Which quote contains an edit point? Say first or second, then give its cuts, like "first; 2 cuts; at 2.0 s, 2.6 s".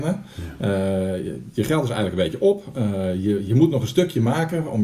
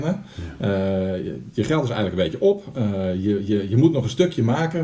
first; 1 cut; at 3.5 s